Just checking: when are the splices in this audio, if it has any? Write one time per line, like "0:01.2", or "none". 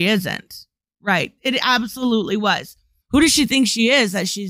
0:01.4
0:03.0